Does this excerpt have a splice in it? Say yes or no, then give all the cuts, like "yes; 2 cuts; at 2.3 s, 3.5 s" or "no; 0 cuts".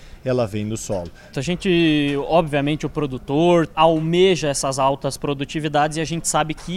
yes; 2 cuts; at 1.3 s, 3.7 s